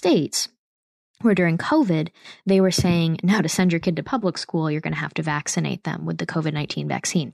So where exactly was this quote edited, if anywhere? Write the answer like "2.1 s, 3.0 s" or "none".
none